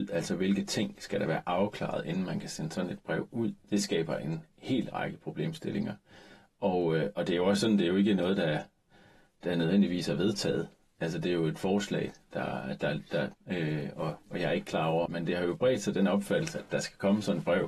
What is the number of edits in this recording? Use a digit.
2